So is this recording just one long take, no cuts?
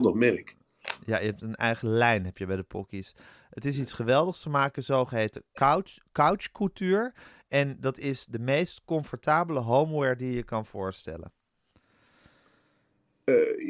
yes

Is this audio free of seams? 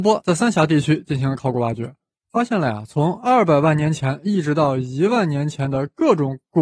yes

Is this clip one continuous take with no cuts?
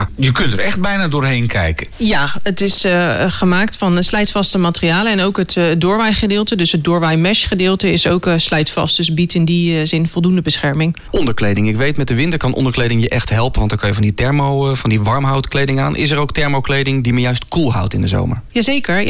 yes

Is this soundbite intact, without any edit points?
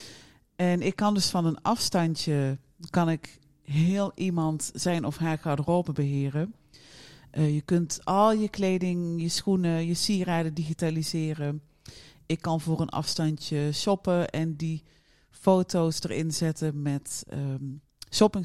yes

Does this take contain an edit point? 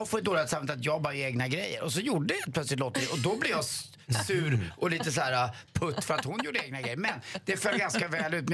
no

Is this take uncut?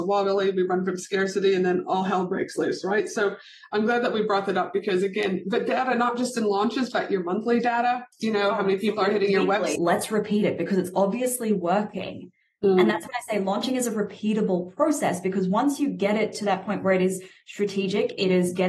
no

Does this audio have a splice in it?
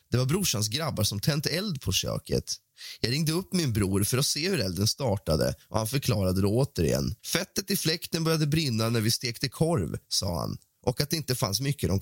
yes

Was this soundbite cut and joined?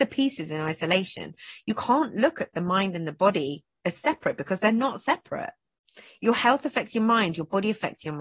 no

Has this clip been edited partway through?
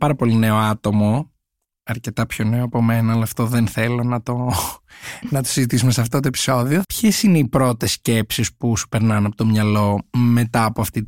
yes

